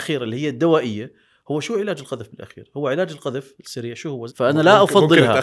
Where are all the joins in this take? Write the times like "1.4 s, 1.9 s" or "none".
4.3 s